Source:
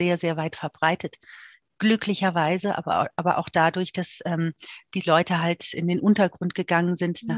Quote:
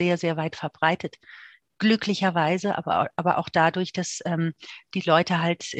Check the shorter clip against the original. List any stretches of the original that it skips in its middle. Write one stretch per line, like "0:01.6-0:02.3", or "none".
none